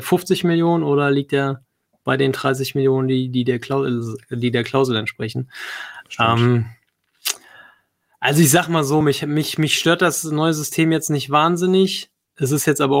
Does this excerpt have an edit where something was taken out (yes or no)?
no